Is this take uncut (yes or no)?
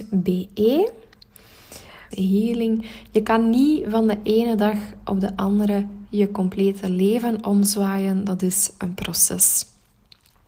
no